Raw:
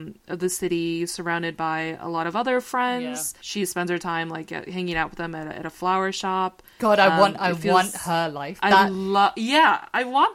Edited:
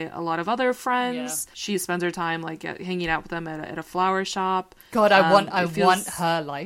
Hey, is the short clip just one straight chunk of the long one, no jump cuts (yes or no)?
yes